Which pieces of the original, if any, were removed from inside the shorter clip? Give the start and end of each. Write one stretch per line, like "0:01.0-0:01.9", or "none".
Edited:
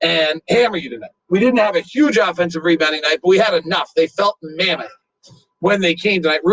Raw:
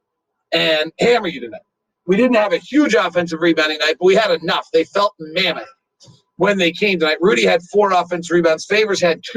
0:01.7-0:02.0

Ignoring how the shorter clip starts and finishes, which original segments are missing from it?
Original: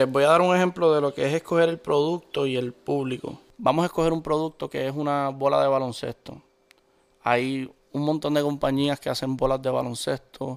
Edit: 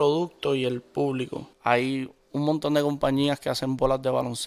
0:03.4-0:07.1

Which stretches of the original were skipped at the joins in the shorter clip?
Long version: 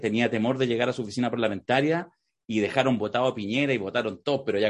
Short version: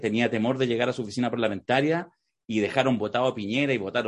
none

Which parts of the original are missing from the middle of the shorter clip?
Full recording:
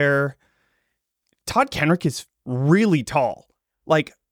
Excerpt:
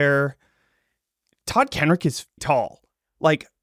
0:02.4-0:03.0

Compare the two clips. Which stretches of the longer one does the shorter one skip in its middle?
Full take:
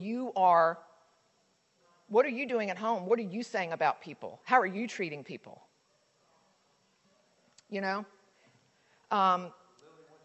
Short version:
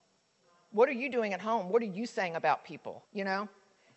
0:04.4-0:07.6

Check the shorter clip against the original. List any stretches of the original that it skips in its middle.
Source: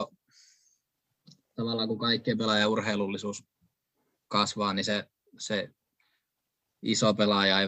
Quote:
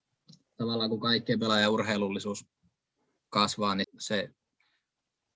0:04.8-0:05.2

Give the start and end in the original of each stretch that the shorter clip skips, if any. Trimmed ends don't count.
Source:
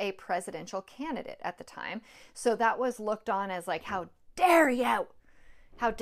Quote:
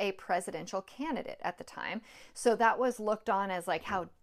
none

